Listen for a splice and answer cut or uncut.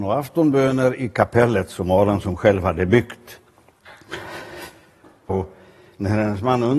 cut